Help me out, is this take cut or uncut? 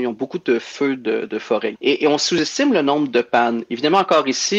cut